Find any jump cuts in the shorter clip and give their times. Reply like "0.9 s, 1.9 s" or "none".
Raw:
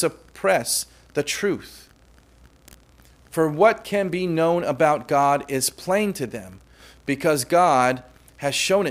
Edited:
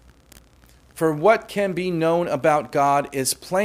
none